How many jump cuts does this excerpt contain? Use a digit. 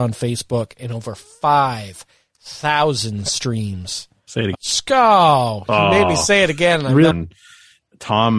2